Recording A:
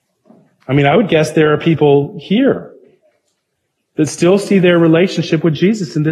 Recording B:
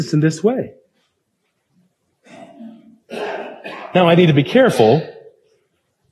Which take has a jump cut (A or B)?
B